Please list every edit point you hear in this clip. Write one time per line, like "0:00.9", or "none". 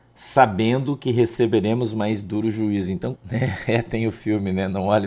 0:03.2